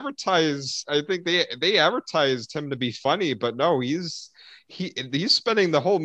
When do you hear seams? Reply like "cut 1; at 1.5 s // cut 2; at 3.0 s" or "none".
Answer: none